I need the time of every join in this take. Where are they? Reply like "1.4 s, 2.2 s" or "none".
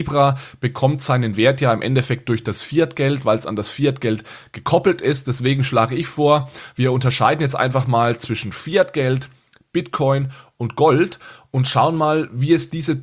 none